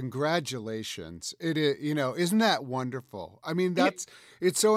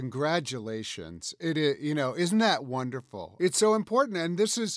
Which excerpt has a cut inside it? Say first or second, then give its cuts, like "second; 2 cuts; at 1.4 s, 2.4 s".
second; 1 cut; at 3.4 s